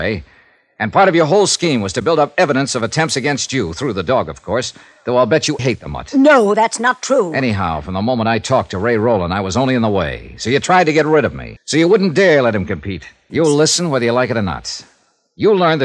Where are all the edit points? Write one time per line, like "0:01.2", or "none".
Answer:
0:05.6
0:11.6
0:13.3